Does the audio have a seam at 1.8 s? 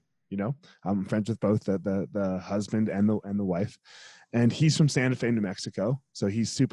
no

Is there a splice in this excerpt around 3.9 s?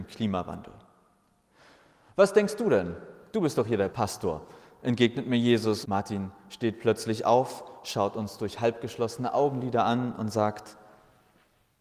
yes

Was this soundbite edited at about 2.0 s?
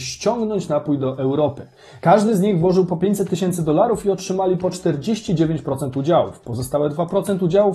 yes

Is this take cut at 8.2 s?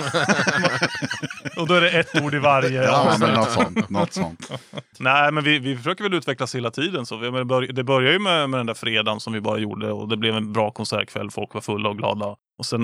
no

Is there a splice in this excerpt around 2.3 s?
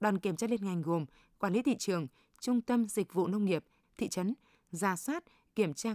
no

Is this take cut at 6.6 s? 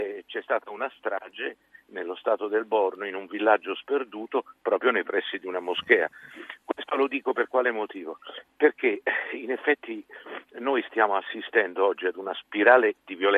no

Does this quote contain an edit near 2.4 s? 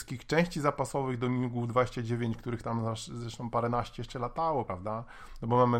no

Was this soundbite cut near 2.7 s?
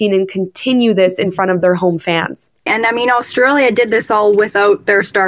yes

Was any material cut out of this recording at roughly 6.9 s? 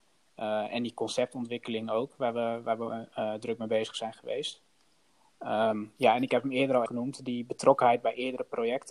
yes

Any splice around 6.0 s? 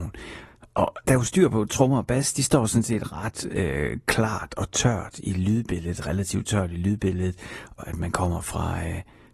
no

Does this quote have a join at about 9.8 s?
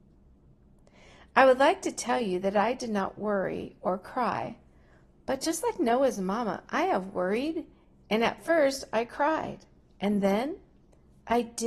yes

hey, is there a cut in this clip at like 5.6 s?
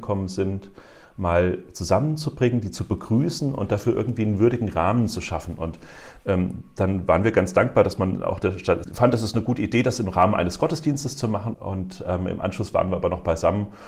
no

